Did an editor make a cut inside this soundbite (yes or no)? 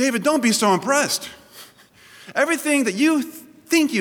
no